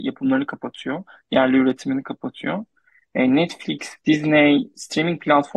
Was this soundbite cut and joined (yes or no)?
no